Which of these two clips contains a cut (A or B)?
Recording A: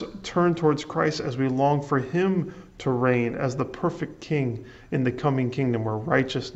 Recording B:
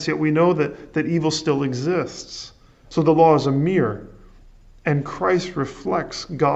B